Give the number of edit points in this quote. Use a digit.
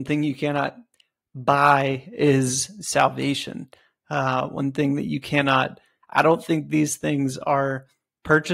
1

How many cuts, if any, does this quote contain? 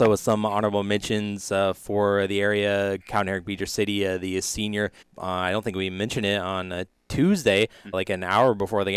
3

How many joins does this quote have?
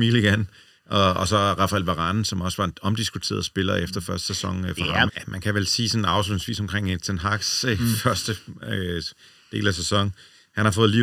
1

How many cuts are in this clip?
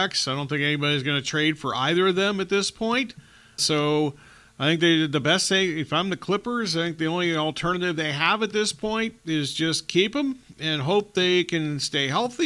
1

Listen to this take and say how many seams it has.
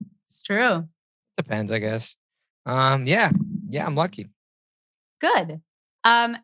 0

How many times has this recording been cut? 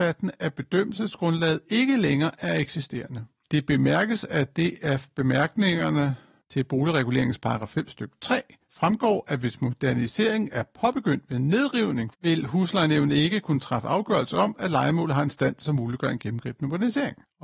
0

